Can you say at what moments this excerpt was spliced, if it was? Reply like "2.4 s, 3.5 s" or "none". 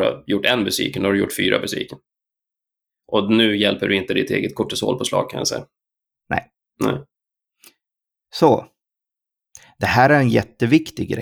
none